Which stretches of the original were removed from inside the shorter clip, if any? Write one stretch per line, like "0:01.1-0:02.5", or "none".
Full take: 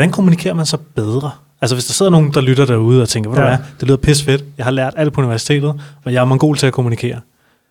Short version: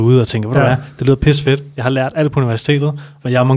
none